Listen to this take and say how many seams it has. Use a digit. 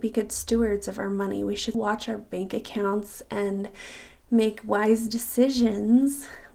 1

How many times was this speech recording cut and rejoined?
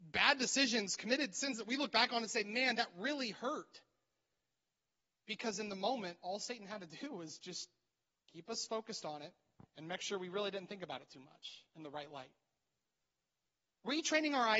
0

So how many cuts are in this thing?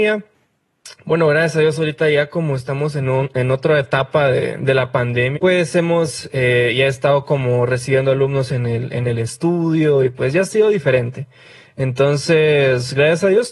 1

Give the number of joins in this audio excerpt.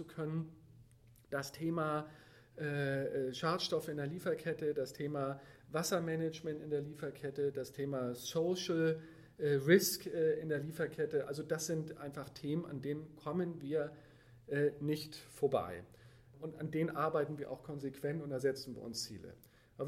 0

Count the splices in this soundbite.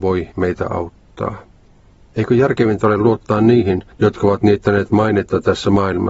1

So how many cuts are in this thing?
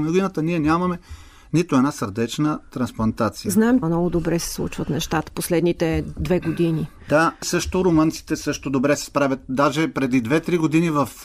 1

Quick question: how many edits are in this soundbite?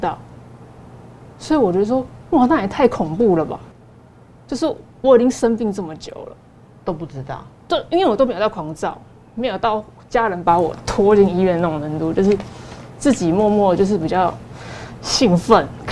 1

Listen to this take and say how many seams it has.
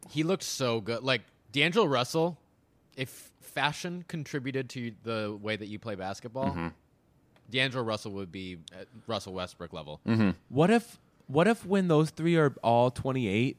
1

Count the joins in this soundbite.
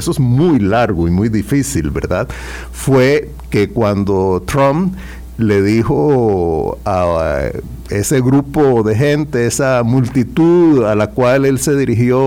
0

